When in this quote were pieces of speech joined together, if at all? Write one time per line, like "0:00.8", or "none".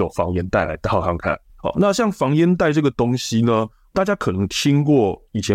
0:01.5